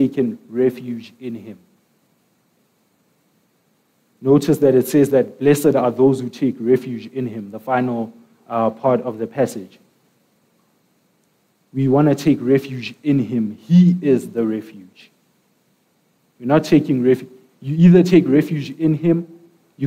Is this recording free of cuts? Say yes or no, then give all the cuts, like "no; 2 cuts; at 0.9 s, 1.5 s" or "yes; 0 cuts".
yes; 0 cuts